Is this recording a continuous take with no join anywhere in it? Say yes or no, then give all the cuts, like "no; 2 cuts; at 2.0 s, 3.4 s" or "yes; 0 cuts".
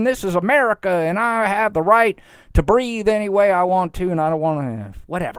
yes; 0 cuts